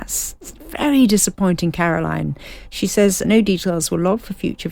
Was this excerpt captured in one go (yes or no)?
no